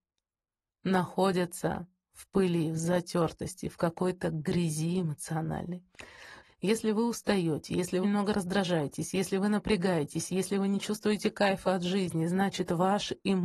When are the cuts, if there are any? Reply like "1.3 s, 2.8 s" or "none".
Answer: 6.4 s, 8.0 s